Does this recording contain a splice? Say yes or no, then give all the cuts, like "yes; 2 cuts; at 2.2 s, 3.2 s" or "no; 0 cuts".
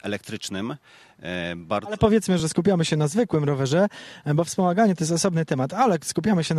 no; 0 cuts